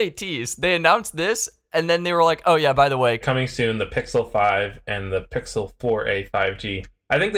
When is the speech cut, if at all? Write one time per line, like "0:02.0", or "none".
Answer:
0:03.2